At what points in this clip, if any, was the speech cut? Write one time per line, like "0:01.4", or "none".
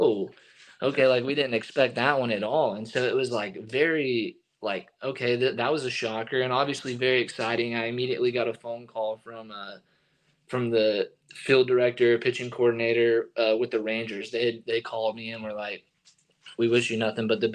none